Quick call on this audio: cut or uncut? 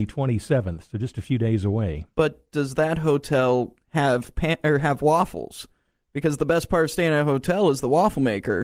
uncut